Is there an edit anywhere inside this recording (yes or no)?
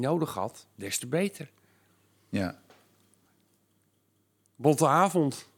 no